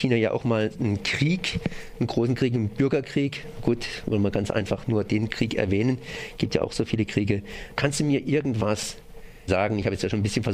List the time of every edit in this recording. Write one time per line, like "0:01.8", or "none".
0:07.8
0:09.5